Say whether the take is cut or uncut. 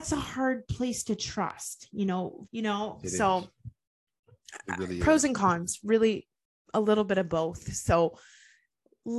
cut